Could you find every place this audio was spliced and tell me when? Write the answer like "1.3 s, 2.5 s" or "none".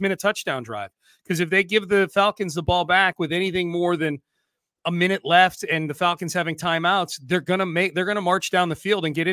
none